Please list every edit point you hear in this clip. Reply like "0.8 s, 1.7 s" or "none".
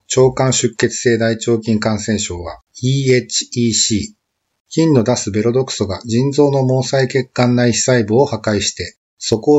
2.7 s, 4.6 s